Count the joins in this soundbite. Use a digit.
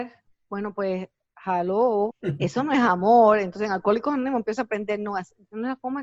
1